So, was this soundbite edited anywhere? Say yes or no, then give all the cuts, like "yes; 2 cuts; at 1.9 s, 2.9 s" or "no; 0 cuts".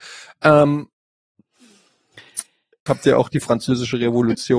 yes; 1 cut; at 2.9 s